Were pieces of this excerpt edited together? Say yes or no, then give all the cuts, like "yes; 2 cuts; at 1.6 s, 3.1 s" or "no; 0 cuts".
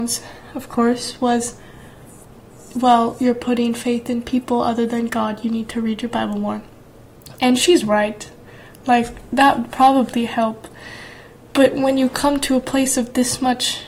no; 0 cuts